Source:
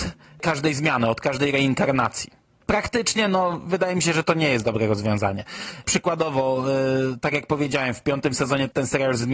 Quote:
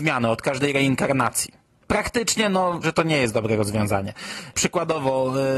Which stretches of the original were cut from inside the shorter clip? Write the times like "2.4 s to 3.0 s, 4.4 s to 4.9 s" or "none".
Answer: 3.6 s to 4.1 s